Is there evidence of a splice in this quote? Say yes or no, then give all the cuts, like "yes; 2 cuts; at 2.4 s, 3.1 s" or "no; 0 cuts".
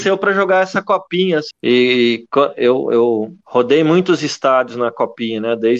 yes; 2 cuts; at 1.5 s, 3.4 s